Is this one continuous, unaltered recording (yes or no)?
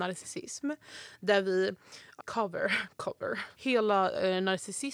no